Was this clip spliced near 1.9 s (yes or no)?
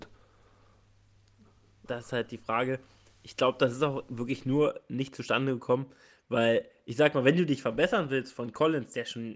yes